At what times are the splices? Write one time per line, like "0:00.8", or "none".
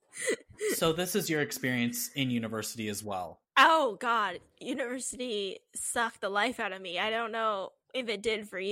none